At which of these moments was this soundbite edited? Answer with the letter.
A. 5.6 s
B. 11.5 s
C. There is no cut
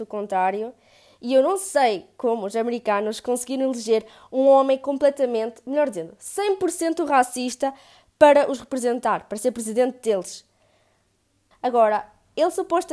B